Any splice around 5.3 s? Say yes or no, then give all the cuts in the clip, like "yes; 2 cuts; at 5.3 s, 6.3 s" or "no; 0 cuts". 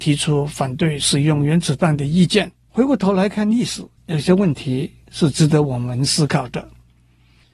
no; 2 cuts; at 2.7 s, 4.0 s